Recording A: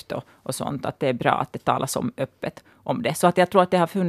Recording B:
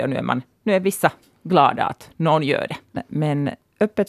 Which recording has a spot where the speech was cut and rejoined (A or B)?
B